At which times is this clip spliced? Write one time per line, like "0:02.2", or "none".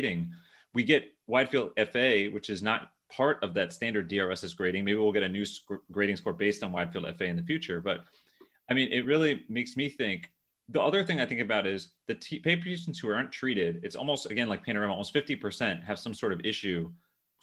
none